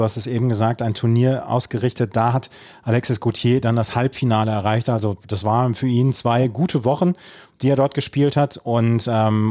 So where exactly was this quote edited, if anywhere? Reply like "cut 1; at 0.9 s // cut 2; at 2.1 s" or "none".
none

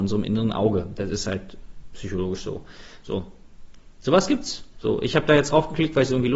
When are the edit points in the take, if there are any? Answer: cut 1; at 3.0 s

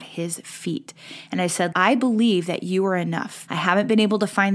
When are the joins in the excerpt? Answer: cut 1; at 1.7 s // cut 2; at 3.5 s

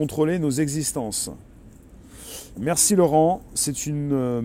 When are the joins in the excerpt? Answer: cut 1; at 2.6 s

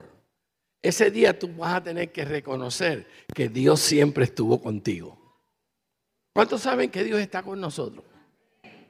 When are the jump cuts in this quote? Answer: none

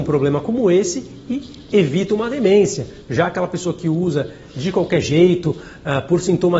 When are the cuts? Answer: cut 1; at 1.7 s

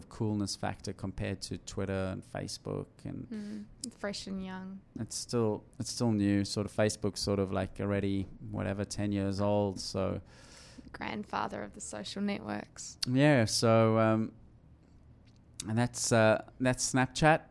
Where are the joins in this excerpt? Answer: cut 1; at 3.9 s

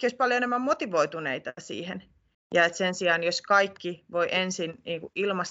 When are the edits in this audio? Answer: cut 1; at 2.3 s

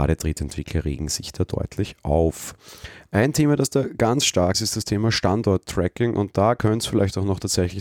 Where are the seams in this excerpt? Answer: cut 1; at 4.5 s

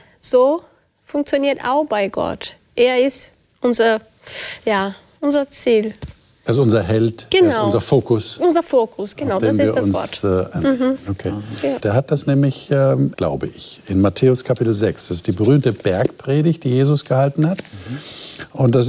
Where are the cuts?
cut 1; at 11.8 s // cut 2; at 13.1 s

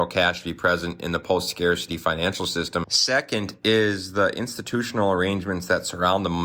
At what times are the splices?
cut 1; at 2.8 s

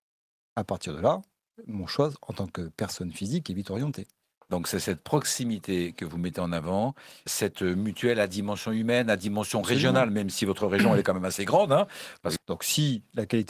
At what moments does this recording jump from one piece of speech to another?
cut 1; at 7.3 s // cut 2; at 12.4 s

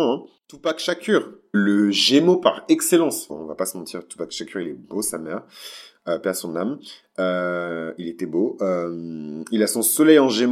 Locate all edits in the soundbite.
cut 1; at 1.5 s // cut 2; at 3.3 s

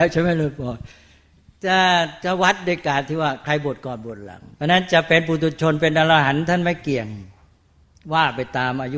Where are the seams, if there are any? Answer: cut 1; at 4.5 s

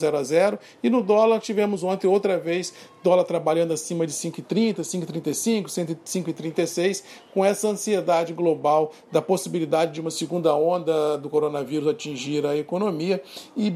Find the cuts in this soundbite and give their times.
none

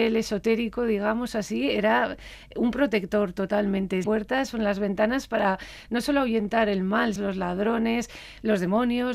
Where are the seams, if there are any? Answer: cut 1; at 4.0 s // cut 2; at 7.2 s

